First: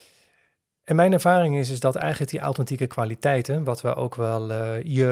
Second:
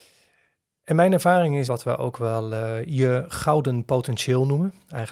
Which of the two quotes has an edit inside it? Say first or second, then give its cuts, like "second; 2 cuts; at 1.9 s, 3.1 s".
second; 1 cut; at 1.7 s